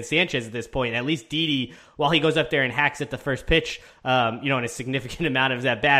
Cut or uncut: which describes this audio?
uncut